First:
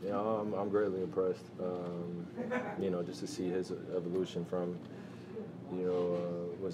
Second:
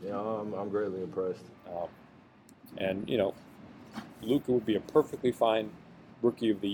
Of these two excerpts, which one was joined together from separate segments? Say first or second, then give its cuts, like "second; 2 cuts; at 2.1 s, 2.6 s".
second; 1 cut; at 1.5 s